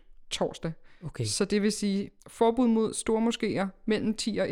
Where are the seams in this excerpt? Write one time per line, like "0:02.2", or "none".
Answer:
0:02.2